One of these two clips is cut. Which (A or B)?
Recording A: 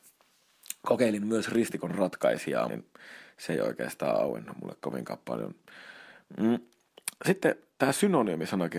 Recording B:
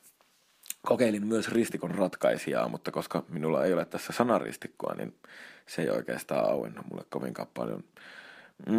A